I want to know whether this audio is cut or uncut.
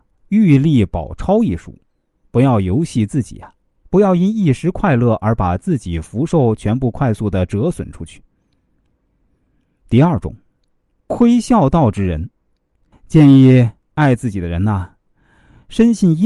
cut